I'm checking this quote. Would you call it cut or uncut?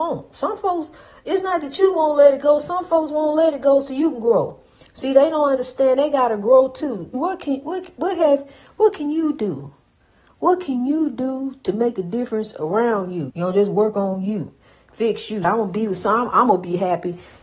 cut